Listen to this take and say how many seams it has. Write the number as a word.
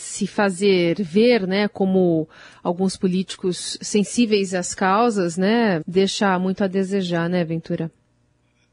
one